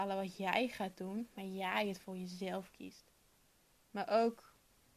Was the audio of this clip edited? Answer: yes; 1 cut; at 3.8 s

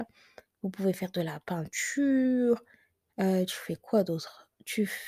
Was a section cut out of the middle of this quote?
no; 0 cuts

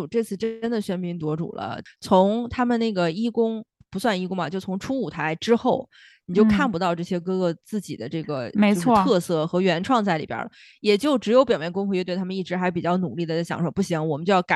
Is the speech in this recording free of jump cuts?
yes; 0 cuts

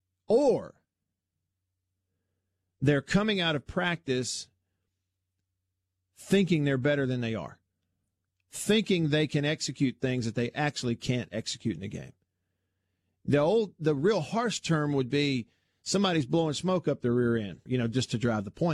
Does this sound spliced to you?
yes; 1 cut; at 17.7 s

